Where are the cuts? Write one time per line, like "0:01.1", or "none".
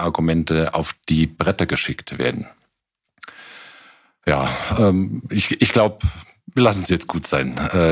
none